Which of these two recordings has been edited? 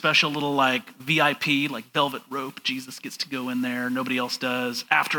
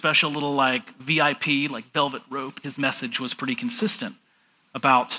second; 1 cut; at 2.6 s

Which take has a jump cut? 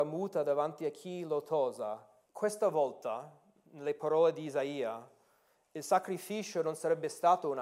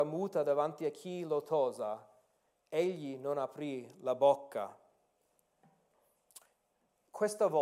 first; 1 cut; at 2.2 s

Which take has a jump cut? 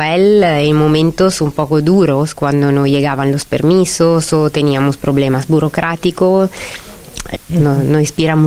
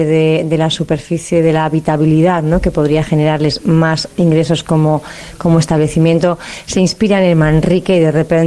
first; 1 cut; at 7.4 s

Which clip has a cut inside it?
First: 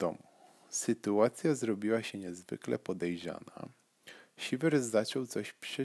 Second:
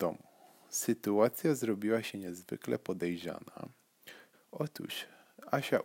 second; 1 cut; at 4.3 s

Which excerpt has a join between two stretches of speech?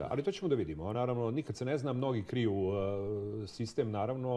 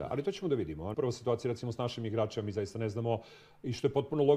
second; 1 cut; at 0.9 s

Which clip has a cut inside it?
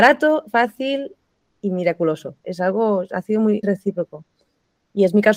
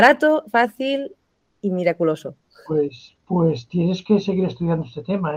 first; 2 cuts; at 2.4 s, 3.6 s

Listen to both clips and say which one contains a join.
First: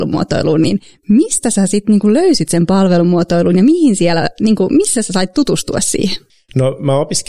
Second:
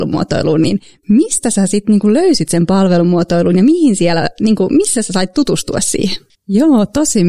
second; 1 cut; at 6.3 s

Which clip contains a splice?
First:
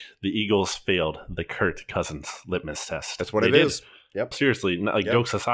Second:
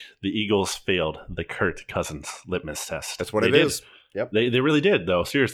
first; 1 cut; at 4.3 s

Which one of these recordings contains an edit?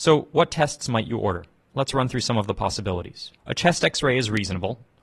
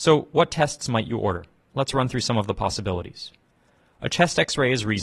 first; 1 cut; at 3.4 s

